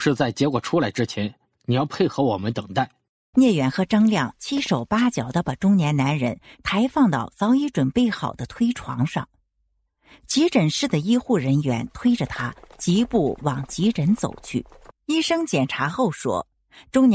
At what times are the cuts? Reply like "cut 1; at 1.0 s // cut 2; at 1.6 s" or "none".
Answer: cut 1; at 3.3 s // cut 2; at 14.9 s